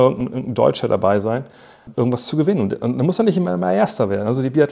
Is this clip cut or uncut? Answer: cut